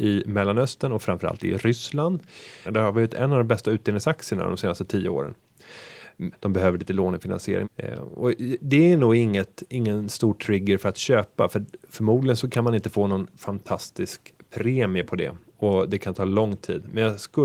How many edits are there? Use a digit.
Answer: 3